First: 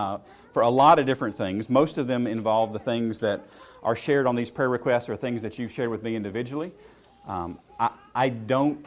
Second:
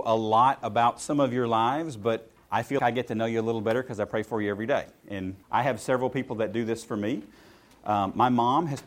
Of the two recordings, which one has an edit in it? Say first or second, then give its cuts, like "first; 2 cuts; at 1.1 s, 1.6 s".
second; 2 cuts; at 2.8 s, 5.4 s